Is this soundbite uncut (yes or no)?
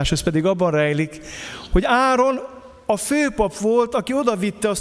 yes